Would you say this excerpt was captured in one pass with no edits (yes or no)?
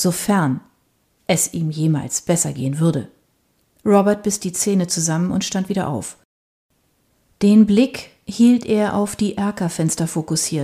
yes